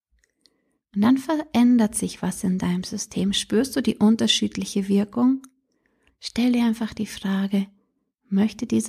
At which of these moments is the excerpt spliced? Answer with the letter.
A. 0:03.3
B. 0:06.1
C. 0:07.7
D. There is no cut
B